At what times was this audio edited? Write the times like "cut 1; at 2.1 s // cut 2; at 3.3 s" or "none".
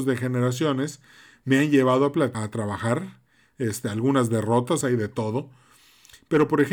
cut 1; at 2.3 s // cut 2; at 4.8 s